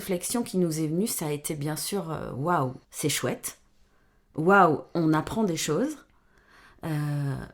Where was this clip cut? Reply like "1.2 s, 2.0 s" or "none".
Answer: 2.8 s